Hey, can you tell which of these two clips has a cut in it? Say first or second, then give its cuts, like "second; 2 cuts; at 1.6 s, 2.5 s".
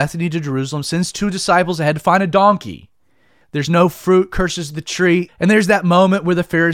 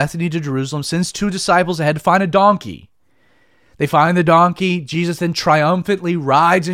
first; 2 cuts; at 3.4 s, 5.3 s